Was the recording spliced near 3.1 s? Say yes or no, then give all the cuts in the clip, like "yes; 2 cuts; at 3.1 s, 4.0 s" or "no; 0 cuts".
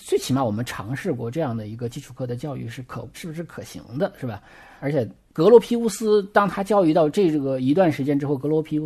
yes; 2 cuts; at 3.1 s, 5.3 s